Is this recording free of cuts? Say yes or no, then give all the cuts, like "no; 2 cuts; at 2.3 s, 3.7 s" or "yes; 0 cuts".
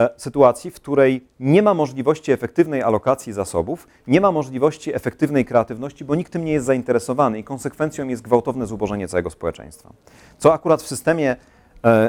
yes; 0 cuts